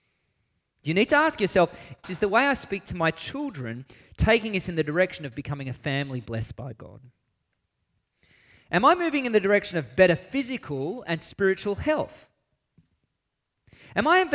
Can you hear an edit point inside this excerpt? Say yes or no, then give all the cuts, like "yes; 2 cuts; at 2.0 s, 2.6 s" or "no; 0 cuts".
yes; 1 cut; at 2.0 s